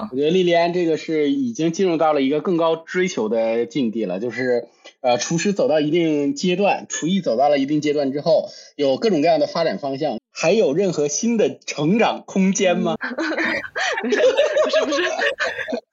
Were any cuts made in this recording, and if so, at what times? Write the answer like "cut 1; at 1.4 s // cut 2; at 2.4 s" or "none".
cut 1; at 10.2 s // cut 2; at 13.0 s